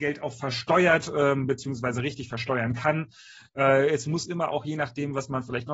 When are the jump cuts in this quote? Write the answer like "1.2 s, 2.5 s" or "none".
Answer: none